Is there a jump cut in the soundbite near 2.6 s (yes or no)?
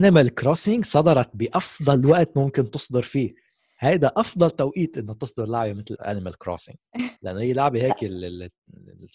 no